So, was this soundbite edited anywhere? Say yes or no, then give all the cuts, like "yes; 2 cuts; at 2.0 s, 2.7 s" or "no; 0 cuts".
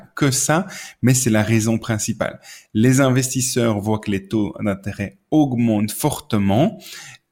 no; 0 cuts